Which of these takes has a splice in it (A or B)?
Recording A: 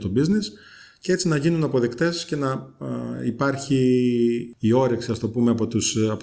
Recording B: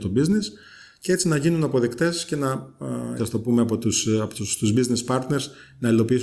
B